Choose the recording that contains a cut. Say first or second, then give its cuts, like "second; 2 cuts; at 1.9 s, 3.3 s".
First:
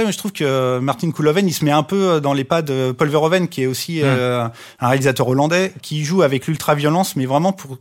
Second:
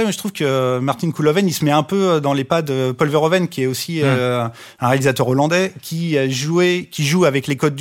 first; 1 cut; at 5.8 s